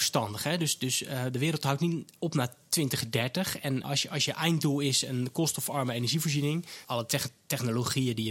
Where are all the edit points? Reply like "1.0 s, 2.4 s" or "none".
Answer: 3.8 s, 6.8 s